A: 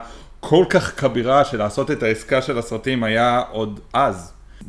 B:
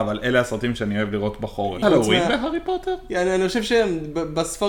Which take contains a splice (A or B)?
B